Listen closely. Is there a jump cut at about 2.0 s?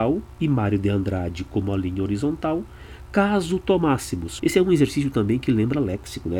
no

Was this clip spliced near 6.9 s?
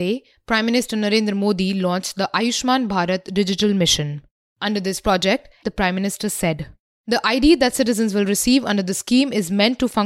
no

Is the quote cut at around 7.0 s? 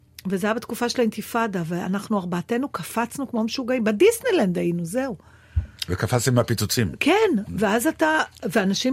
no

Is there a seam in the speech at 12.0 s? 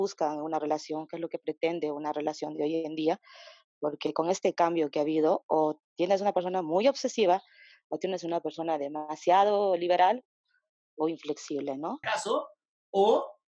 yes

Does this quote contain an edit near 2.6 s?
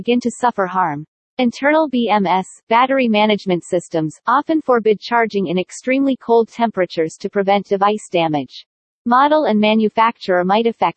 no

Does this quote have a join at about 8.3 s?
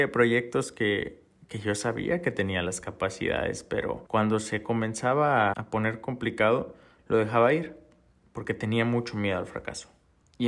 no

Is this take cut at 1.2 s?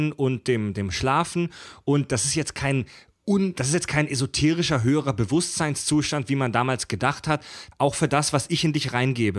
no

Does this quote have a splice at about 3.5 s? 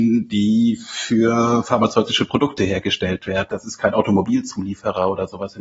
yes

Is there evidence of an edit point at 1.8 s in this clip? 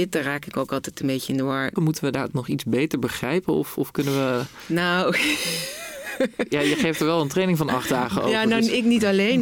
yes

